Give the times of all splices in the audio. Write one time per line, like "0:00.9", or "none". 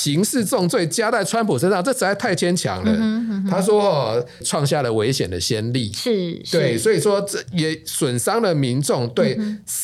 0:04.4